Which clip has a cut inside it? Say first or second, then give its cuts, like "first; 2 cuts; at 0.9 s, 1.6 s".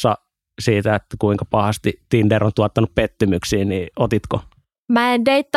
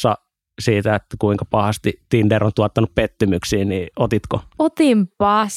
second; 1 cut; at 4.5 s